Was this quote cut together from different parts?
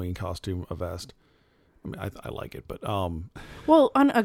no; 0 cuts

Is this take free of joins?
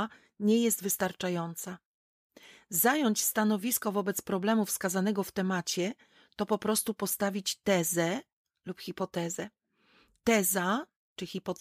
yes; 0 cuts

